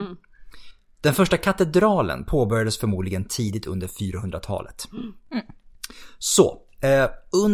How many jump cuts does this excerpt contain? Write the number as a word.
zero